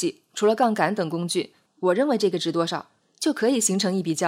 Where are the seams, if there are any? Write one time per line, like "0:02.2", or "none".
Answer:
0:01.7
0:03.0